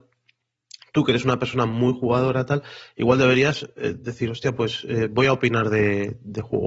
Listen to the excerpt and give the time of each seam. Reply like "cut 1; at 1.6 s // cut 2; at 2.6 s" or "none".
none